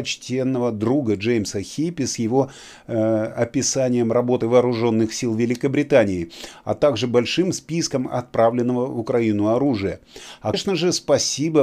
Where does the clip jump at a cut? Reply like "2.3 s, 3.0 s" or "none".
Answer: 10.5 s